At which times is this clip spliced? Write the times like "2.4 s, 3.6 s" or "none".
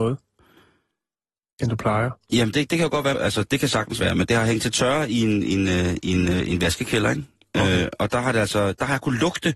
3.1 s